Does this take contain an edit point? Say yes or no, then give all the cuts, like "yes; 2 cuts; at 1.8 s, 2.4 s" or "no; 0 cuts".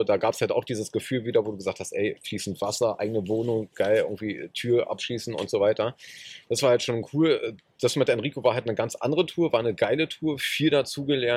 no; 0 cuts